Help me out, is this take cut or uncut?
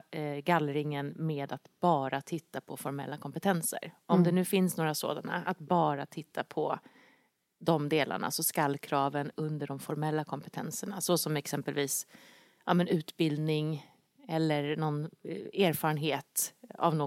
uncut